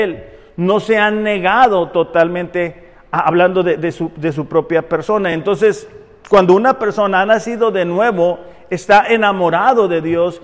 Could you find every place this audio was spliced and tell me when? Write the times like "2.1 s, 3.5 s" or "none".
none